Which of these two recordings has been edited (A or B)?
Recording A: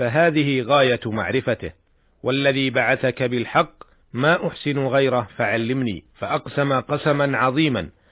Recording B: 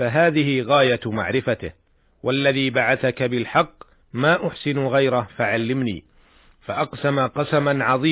A